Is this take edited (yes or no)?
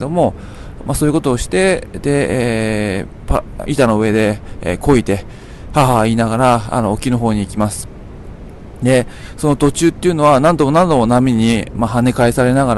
yes